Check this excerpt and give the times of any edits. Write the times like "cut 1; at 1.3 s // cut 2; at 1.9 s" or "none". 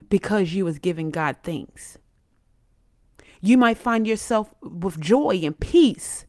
none